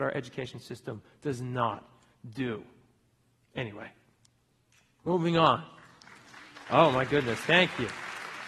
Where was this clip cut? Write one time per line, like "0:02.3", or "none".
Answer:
none